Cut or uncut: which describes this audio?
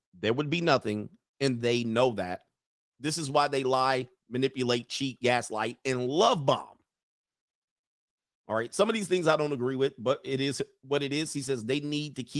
uncut